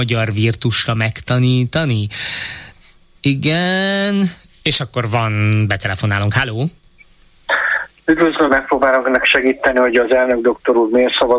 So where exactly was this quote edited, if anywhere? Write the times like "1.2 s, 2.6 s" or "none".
8.5 s